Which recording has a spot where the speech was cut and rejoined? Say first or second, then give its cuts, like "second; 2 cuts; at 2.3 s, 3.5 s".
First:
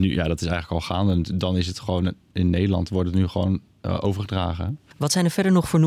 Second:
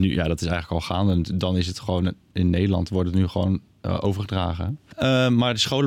second; 1 cut; at 4.9 s